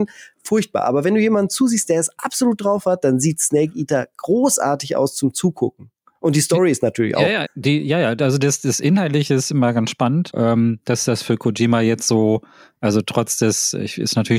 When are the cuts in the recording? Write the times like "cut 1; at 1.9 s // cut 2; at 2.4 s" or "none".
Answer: cut 1; at 7.5 s // cut 2; at 10.3 s